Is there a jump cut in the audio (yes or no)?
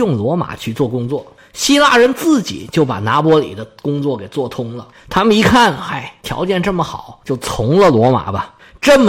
no